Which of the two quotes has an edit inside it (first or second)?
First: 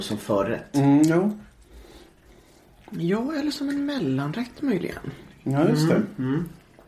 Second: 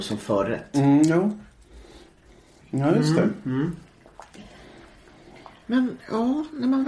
second